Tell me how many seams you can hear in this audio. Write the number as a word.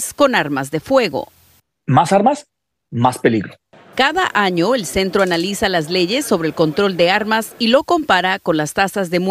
zero